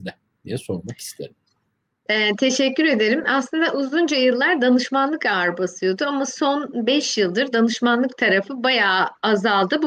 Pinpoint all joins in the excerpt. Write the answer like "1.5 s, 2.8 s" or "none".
none